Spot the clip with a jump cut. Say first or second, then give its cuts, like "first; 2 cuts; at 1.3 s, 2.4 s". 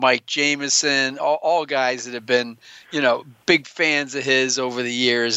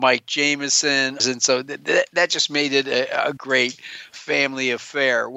second; 2 cuts; at 1.2 s, 3.4 s